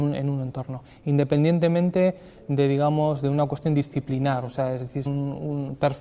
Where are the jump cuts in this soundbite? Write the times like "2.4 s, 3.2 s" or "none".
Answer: 5.1 s